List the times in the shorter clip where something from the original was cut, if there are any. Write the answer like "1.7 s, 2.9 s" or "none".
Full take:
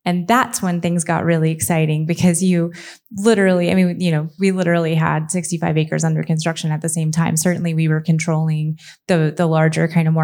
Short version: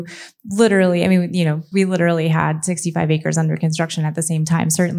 none